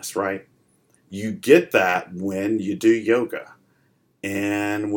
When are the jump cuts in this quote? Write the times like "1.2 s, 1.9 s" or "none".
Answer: 1.0 s